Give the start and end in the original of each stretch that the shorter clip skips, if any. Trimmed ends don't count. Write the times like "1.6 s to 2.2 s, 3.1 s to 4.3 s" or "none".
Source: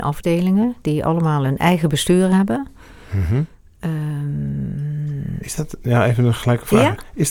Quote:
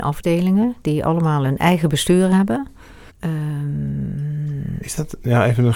3.1 s to 3.7 s